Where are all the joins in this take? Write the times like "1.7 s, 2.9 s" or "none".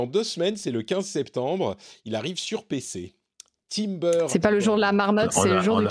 none